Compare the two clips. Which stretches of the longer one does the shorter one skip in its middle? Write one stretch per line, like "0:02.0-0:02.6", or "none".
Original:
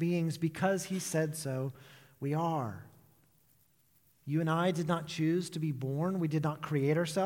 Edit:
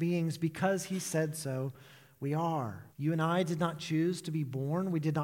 0:02.9-0:04.2